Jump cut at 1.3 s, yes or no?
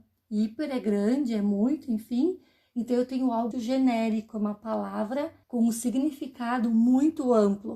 no